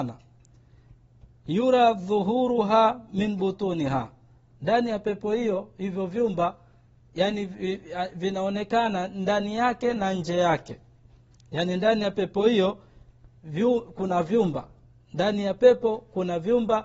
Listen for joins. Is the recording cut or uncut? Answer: uncut